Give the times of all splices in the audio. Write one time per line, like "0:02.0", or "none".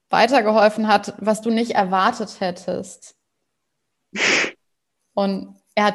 0:05.0